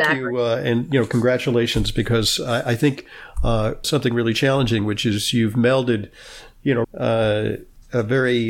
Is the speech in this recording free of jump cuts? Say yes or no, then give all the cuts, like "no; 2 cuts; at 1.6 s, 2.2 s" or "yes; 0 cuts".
no; 2 cuts; at 3.8 s, 6.8 s